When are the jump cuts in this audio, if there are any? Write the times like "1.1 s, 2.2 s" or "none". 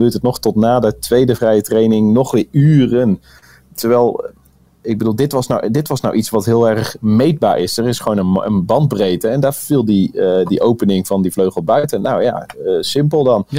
none